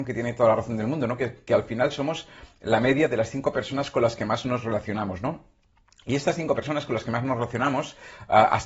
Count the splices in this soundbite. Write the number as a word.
zero